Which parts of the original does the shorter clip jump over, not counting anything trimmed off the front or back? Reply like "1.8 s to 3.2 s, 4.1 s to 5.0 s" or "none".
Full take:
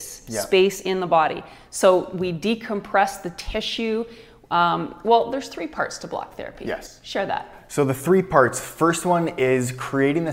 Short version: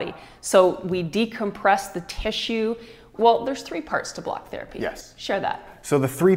4.4 s to 5.0 s